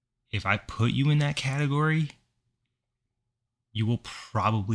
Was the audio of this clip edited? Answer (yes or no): no